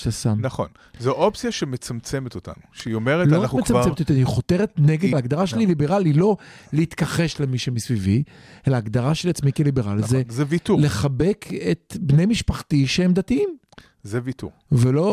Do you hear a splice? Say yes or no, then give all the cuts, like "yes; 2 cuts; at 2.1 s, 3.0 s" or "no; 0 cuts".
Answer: yes; 1 cut; at 5.1 s